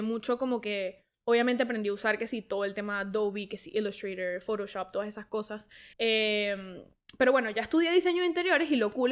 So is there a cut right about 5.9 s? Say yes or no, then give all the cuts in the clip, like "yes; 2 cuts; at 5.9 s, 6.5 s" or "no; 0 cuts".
yes; 1 cut; at 5.9 s